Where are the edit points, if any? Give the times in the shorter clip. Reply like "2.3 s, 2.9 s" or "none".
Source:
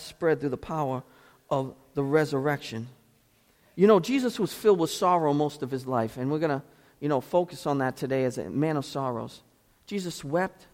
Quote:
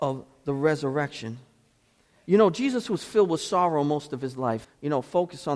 4.6 s